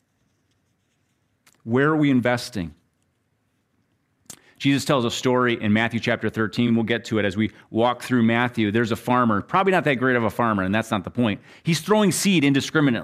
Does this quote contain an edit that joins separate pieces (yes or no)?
no